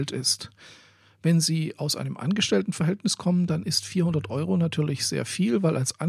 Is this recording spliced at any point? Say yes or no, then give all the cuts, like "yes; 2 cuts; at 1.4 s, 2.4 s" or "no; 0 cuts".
no; 0 cuts